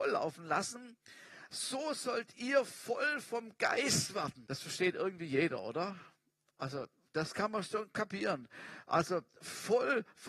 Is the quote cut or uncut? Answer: uncut